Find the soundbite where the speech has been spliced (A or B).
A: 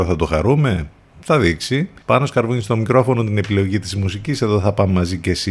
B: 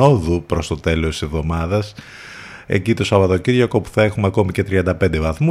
A